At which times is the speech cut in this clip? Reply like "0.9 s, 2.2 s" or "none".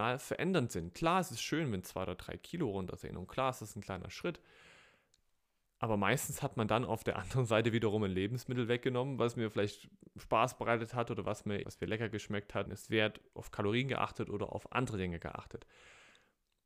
11.6 s, 12.7 s